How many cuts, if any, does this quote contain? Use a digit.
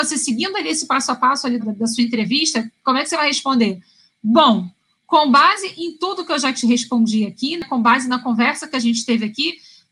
1